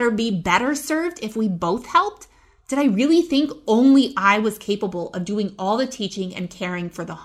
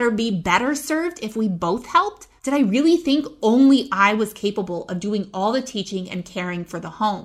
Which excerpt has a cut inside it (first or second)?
second